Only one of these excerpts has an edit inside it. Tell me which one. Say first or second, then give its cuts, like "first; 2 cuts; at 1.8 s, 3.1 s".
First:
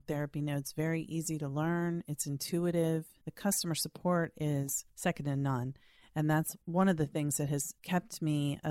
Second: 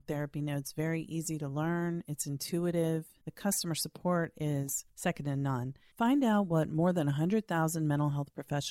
second; 1 cut; at 5.9 s